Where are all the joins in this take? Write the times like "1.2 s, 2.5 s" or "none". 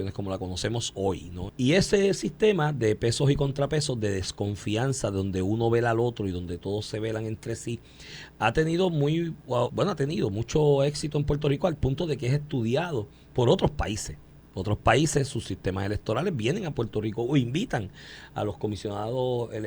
1.5 s, 9.7 s